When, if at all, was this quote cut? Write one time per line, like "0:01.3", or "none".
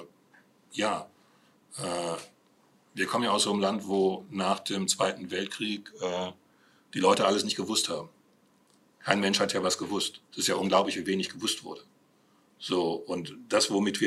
0:10.2